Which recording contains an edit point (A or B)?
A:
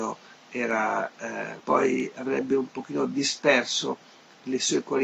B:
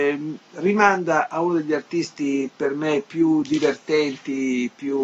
A